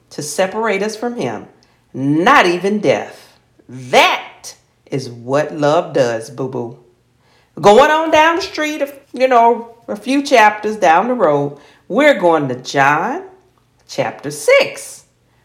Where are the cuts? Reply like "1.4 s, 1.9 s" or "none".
9.0 s